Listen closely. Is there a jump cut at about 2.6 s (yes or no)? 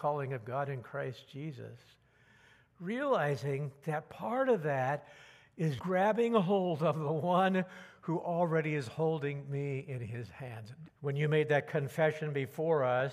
no